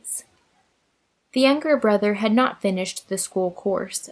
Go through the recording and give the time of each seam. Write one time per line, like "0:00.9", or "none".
0:01.2